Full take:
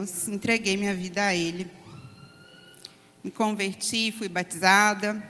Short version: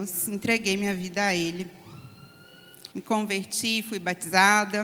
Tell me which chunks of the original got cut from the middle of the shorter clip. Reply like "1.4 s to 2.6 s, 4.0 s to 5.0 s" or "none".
2.9 s to 3.2 s